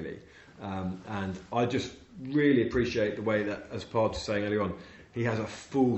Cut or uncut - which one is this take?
uncut